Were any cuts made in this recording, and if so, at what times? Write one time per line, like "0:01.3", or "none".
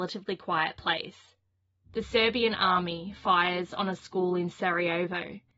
0:01.8

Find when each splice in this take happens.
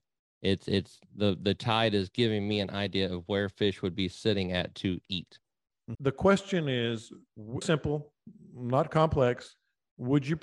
0:05.9
0:07.6

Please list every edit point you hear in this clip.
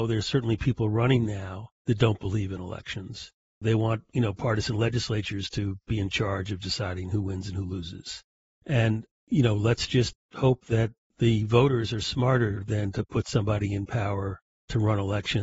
none

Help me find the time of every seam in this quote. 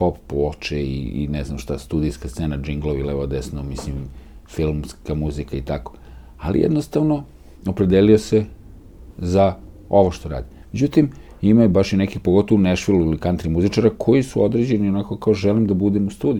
0:10.6

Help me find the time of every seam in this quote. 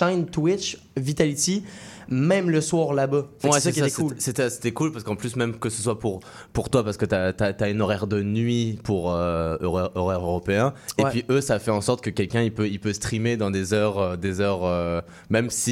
none

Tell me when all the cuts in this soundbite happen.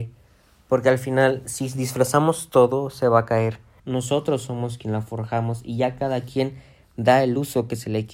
0:03.8

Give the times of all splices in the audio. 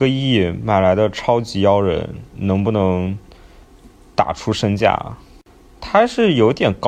none

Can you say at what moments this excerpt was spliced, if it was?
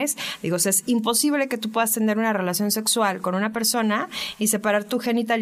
none

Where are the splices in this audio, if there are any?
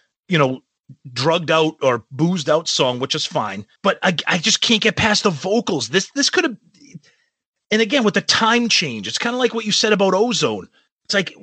0:03.8

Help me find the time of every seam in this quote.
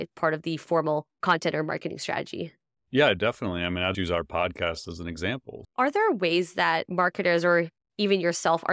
0:03.9
0:05.6

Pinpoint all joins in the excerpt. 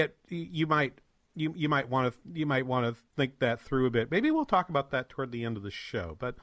none

